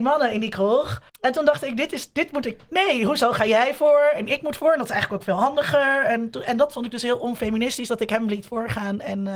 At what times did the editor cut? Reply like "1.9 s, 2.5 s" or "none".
1.1 s